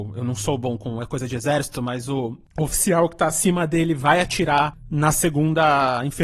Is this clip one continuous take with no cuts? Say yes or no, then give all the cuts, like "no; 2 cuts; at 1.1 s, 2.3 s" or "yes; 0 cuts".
yes; 0 cuts